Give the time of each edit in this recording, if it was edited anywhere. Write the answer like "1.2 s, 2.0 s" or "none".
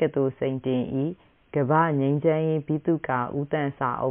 none